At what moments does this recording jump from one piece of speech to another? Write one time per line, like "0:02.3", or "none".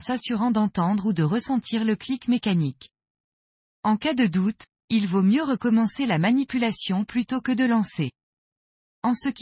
none